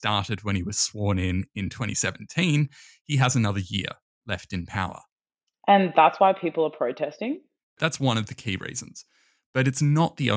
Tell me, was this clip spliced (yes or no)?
no